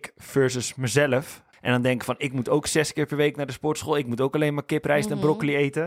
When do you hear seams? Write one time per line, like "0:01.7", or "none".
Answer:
0:01.5